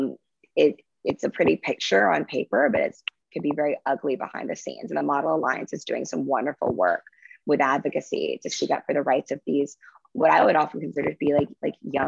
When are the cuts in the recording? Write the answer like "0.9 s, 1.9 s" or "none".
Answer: none